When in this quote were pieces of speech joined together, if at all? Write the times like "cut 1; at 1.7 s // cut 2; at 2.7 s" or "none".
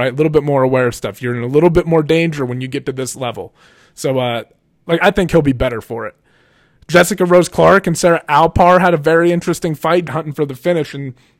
cut 1; at 5.0 s // cut 2; at 10.1 s